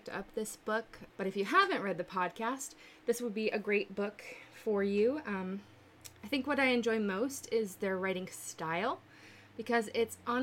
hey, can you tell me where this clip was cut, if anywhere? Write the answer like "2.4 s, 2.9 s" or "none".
1.1 s, 6.2 s